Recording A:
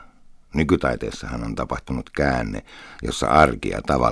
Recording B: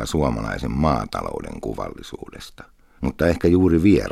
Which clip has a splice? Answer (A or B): B